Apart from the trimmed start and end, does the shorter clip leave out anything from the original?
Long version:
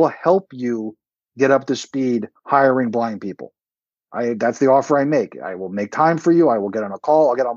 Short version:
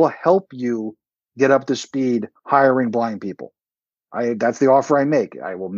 no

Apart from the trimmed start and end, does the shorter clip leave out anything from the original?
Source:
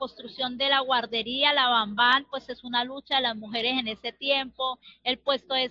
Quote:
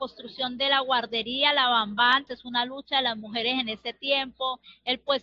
yes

